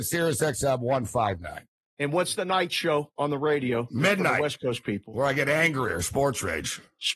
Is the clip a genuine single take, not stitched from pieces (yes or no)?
yes